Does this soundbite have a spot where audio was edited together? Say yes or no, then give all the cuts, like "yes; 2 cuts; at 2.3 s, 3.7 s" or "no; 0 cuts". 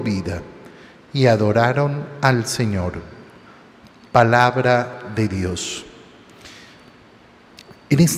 no; 0 cuts